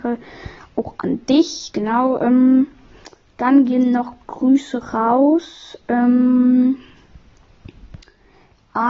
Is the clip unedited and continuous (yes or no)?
yes